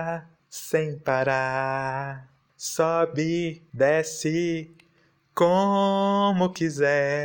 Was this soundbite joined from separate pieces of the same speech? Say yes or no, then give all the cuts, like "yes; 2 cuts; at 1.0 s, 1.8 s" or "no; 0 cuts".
no; 0 cuts